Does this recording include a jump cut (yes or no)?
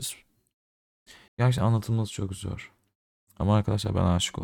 yes